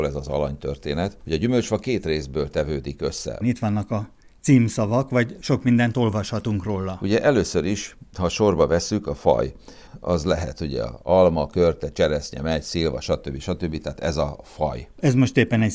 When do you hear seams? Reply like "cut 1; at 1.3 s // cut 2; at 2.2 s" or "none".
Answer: cut 1; at 3.4 s